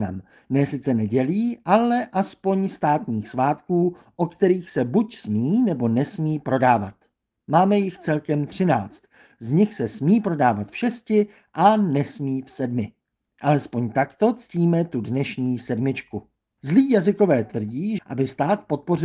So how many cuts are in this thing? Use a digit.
2